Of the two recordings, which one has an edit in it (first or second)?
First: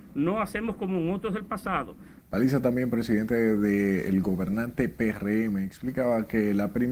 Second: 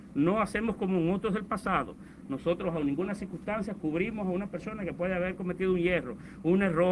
first